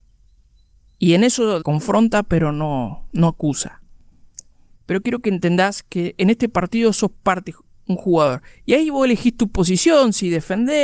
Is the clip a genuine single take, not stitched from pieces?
no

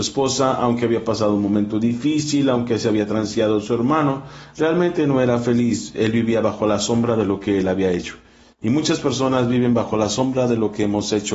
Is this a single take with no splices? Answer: yes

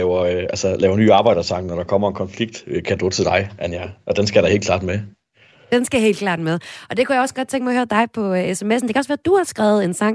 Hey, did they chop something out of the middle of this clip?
no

